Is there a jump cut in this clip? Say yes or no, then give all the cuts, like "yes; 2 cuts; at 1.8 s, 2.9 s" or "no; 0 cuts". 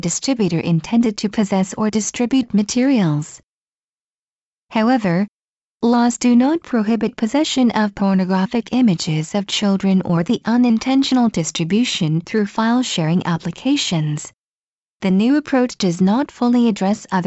yes; 1 cut; at 14.8 s